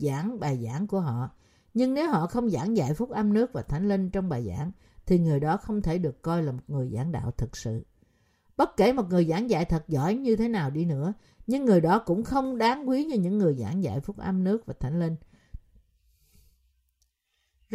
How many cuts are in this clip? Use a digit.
0